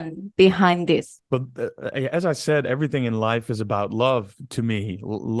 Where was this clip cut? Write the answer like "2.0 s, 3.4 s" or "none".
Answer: none